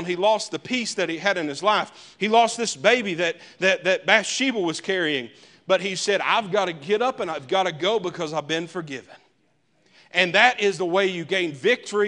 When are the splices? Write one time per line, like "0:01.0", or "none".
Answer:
none

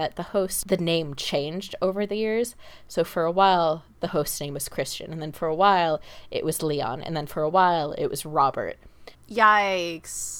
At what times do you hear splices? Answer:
0:09.1

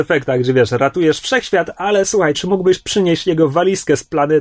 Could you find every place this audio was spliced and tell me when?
0:02.3

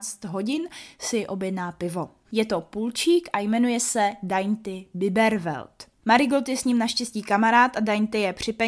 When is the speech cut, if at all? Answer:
0:02.2

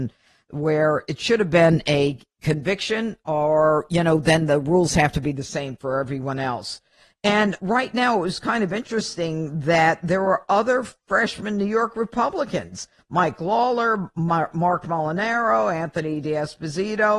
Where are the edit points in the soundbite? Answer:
0:07.6

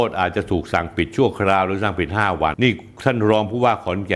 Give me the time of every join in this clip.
0:02.5

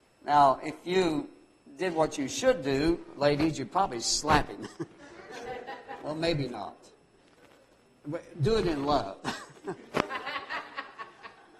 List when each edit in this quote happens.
none

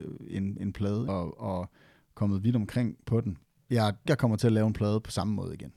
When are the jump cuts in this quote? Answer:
0:01.1
0:04.1

